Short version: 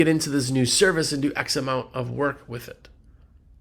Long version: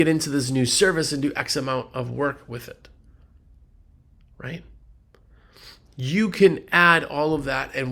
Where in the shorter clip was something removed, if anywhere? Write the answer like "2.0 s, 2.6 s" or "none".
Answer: none